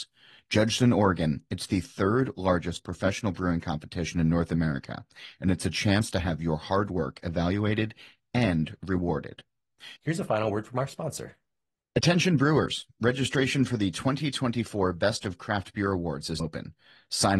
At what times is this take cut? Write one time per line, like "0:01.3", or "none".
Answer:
0:10.0
0:16.4

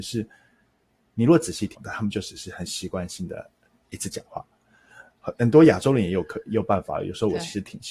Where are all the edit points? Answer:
0:01.7
0:05.2

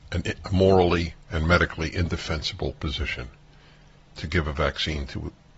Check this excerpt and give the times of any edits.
none

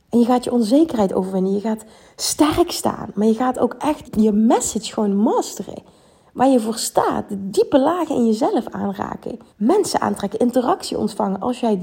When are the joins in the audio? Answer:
0:04.0
0:09.5

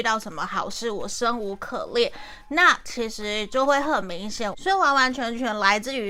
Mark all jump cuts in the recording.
0:04.5

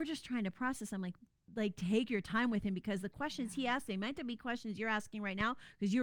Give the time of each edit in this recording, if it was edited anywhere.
0:01.5

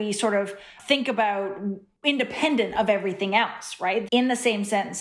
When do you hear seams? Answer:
0:04.1

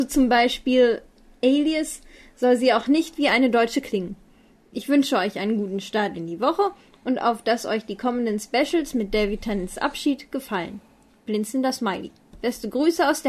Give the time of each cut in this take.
none

